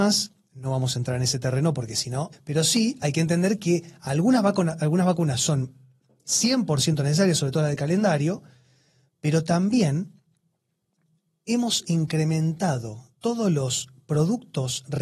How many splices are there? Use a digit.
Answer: 1